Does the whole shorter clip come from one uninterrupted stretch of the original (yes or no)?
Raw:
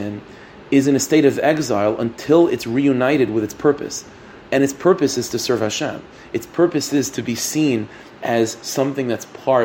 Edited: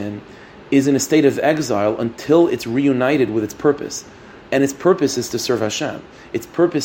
yes